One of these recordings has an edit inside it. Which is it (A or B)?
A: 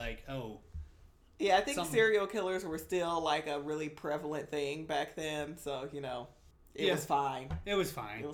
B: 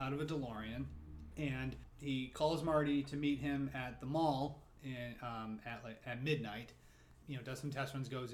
B